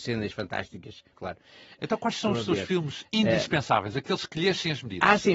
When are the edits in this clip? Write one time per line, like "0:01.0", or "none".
0:01.1